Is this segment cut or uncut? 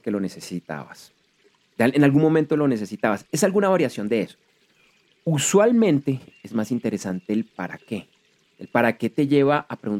uncut